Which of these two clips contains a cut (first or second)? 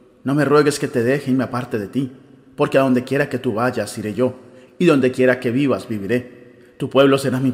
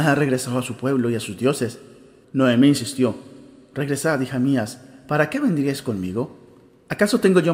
second